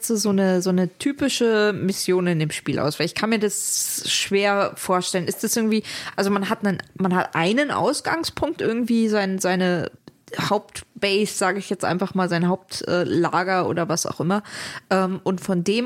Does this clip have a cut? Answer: no; 0 cuts

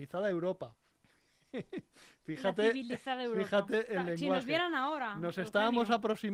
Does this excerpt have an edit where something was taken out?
no; 0 cuts

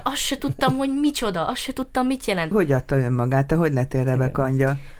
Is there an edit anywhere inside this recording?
yes; 1 cut; at 2.5 s

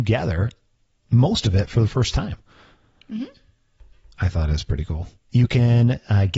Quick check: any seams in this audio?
yes; 1 cut; at 5.3 s

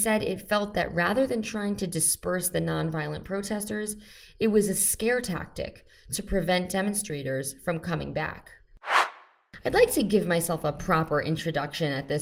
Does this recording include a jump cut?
no; 0 cuts

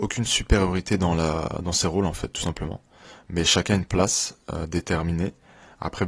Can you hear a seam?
no; 0 cuts

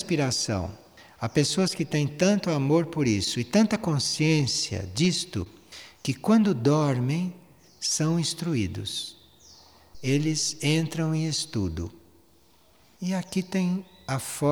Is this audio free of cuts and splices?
yes; 0 cuts

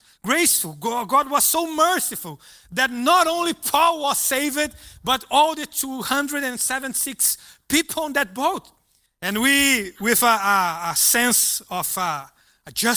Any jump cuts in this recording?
yes; 1 cut; at 9.1 s

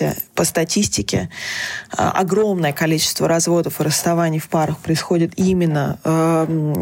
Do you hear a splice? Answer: no; 0 cuts

